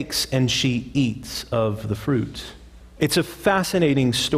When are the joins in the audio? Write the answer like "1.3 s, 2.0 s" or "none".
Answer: 3.0 s